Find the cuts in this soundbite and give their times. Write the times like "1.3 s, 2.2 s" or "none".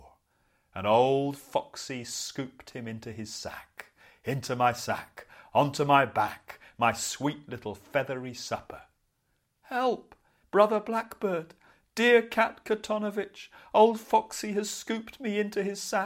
10.4 s